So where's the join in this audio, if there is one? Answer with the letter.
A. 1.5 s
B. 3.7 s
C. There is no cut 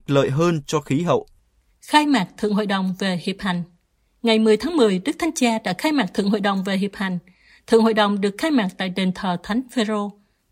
C